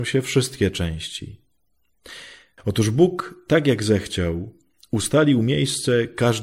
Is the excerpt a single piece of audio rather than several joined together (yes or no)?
no